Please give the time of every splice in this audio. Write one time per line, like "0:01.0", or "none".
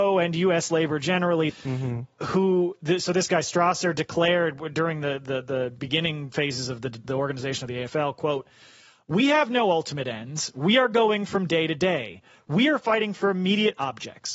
0:01.5